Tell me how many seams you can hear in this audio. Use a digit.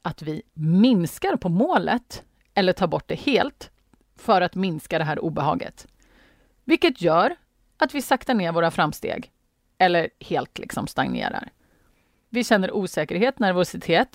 1